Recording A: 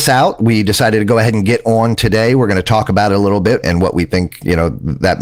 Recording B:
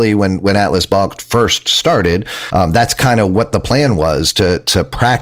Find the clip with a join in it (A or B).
A